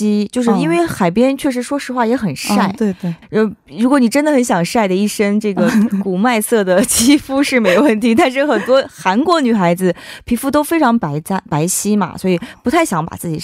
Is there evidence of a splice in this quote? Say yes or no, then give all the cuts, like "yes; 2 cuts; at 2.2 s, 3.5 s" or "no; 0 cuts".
yes; 1 cut; at 3.2 s